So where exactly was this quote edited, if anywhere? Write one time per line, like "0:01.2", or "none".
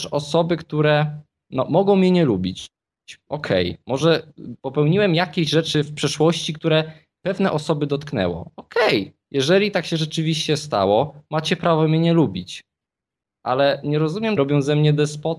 0:09.3
0:14.4

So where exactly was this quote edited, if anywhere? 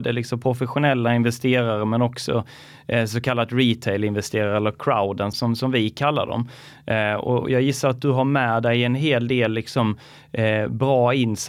0:05.3

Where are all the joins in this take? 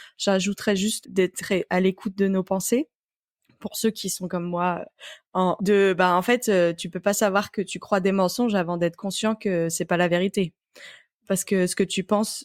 0:01.0
0:05.6

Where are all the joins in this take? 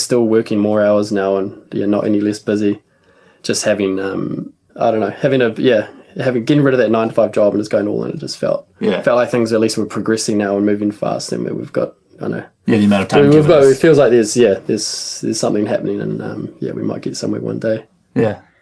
0:04.7

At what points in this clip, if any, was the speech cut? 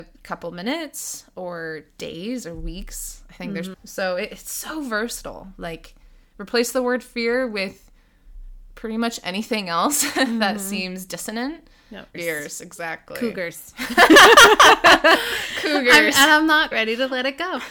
0:03.7
0:12.1
0:16.7

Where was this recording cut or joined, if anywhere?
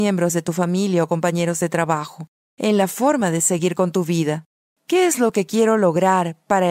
0:04.8

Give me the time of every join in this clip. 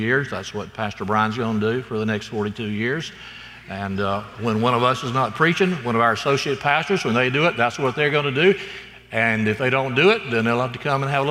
none

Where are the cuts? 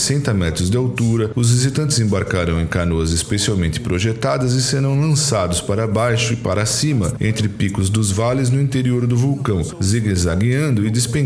none

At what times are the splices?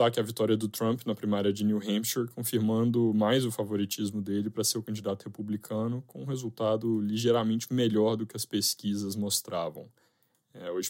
none

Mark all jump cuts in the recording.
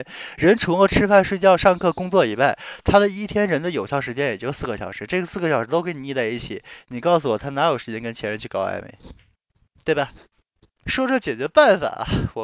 0:10.8

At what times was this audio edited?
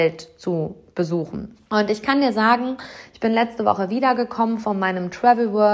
0:01.7

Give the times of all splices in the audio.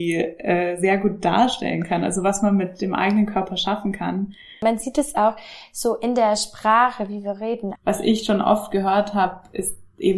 0:07.8

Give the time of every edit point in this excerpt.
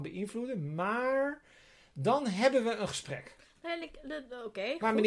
none

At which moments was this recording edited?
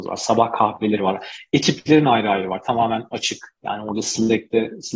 0:03.6

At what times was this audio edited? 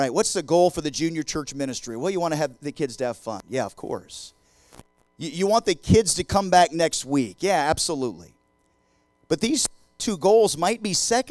none

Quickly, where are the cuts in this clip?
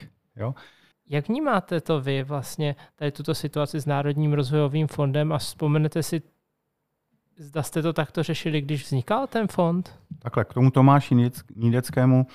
0:00.9

